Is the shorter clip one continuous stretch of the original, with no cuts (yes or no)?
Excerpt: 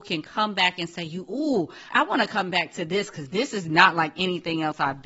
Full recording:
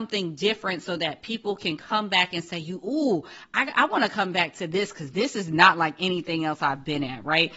no